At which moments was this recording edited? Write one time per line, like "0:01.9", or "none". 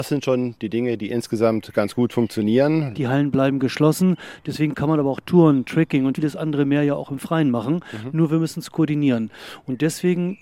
0:02.9
0:06.1